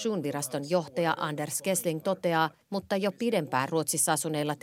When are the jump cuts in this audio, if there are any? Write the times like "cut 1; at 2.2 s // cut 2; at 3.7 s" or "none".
cut 1; at 2.6 s

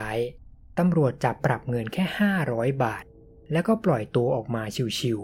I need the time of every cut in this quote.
cut 1; at 1.4 s

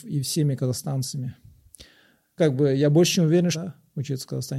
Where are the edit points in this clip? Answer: cut 1; at 2.4 s // cut 2; at 3.5 s

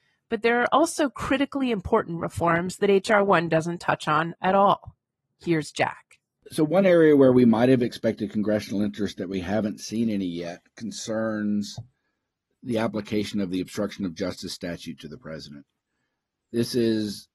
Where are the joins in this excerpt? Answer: none

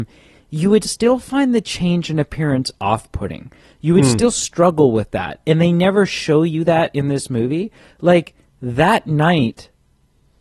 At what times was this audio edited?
none

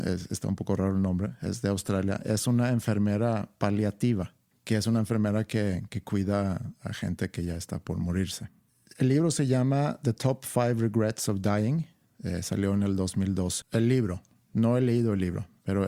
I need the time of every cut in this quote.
cut 1; at 13.6 s

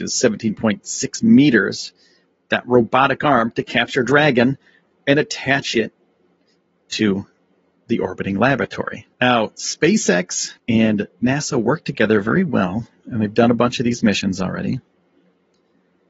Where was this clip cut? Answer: cut 1; at 9.1 s // cut 2; at 10.6 s

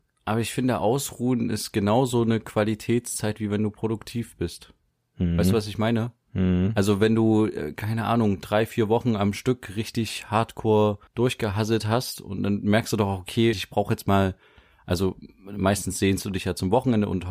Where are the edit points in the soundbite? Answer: cut 1; at 11.1 s // cut 2; at 13.5 s

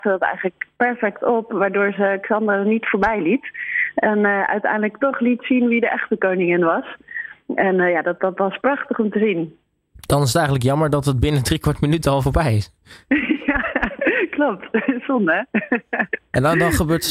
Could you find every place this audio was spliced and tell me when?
none

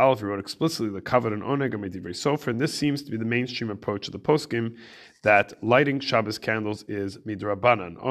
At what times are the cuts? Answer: none

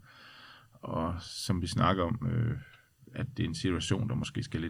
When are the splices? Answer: cut 1; at 3.3 s

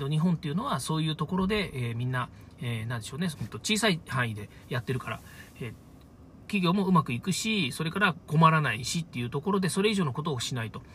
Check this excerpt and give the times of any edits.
cut 1; at 3.3 s

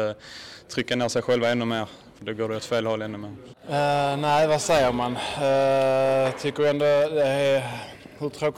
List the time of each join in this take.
cut 1; at 2.2 s // cut 2; at 3.5 s

